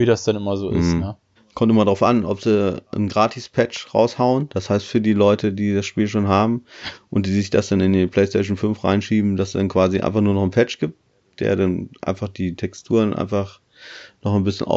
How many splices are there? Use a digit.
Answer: 1